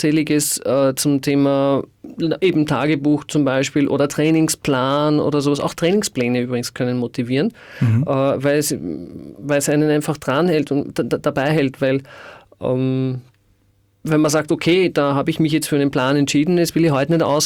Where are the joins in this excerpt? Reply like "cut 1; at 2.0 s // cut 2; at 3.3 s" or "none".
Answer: none